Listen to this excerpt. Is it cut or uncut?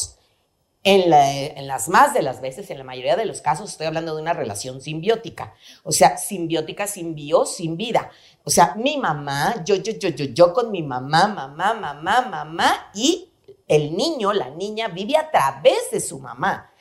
uncut